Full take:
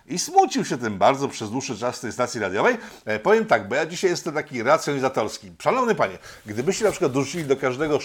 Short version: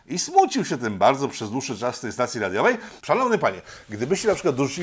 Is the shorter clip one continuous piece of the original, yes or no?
no